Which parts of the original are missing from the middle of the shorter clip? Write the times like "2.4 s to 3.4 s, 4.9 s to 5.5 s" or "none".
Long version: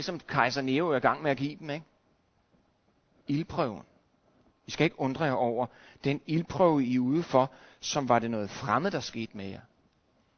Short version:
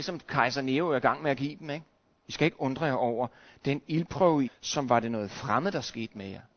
2.1 s to 4.5 s, 6.9 s to 7.7 s